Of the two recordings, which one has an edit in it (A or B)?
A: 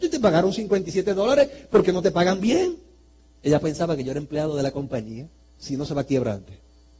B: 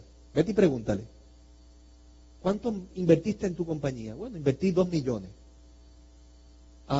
A